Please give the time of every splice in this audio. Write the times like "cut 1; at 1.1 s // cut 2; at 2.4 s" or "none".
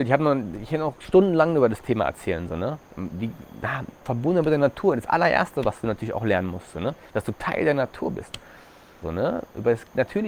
cut 1; at 9.0 s